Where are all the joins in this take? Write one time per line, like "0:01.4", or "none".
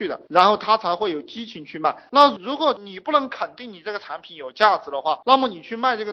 0:02.1